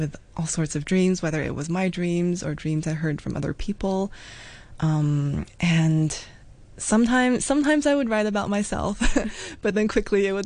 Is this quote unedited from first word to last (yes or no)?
yes